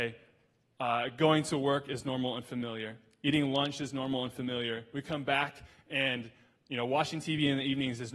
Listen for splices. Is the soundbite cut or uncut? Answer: uncut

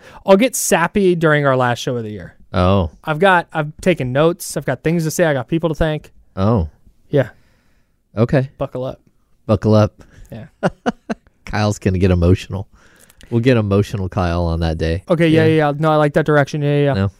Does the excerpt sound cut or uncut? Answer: cut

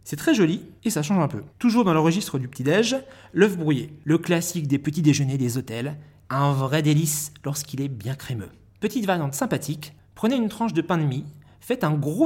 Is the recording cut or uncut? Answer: cut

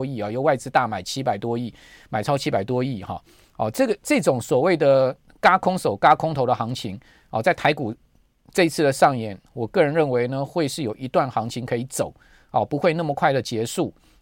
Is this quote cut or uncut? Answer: uncut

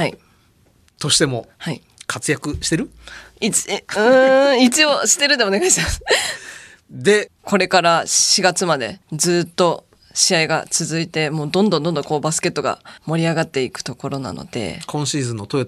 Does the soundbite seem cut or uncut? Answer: cut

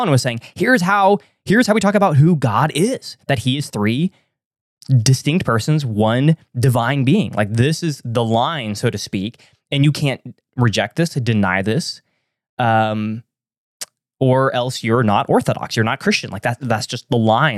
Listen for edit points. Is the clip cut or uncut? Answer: uncut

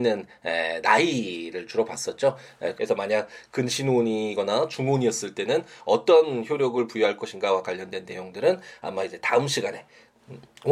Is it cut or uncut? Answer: cut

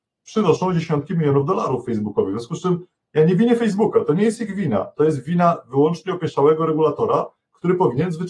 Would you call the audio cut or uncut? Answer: uncut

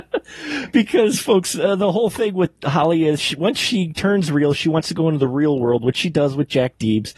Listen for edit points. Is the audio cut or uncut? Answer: uncut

